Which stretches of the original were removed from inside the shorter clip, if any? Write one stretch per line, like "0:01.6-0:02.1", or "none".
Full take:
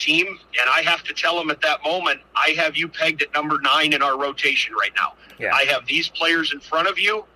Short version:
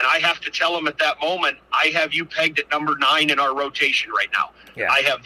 none